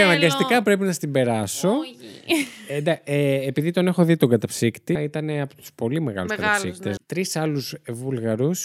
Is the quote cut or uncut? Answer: cut